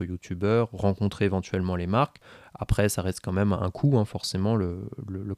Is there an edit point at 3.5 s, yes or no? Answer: yes